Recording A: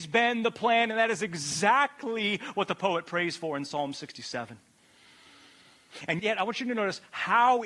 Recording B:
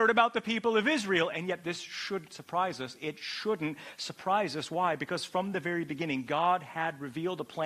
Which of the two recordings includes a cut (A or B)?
A